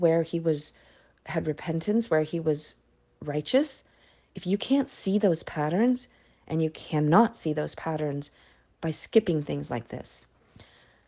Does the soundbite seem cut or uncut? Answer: uncut